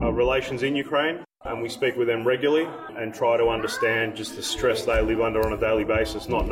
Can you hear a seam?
no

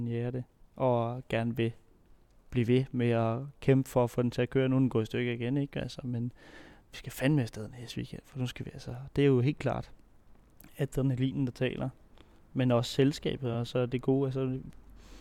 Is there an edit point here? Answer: no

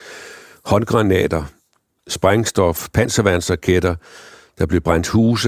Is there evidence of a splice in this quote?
no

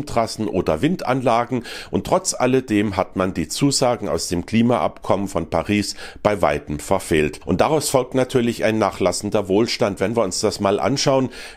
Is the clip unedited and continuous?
no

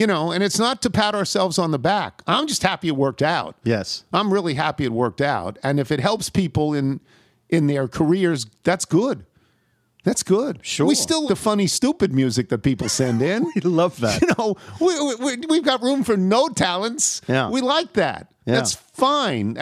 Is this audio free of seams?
no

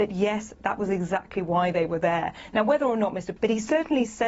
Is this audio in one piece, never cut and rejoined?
no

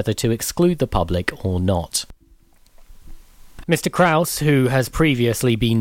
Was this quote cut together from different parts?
yes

